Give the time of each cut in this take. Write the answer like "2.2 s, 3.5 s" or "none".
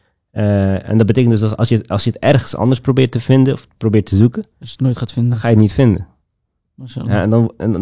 none